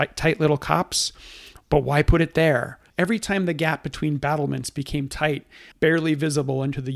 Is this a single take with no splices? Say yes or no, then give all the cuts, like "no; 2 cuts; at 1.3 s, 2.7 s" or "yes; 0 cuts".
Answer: no; 2 cuts; at 2.9 s, 5.7 s